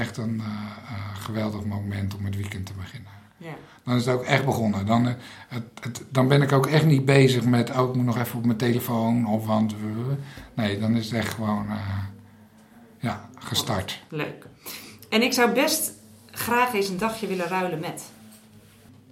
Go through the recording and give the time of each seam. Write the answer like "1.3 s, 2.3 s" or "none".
none

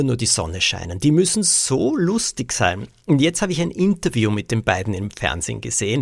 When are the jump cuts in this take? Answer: none

